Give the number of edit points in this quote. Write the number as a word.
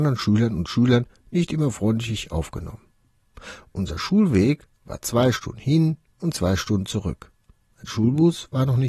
zero